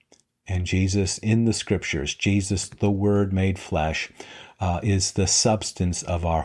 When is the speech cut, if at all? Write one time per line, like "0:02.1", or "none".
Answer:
none